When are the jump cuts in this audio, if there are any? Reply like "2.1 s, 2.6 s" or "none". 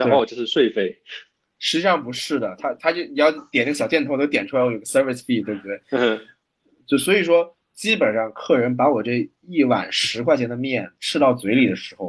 none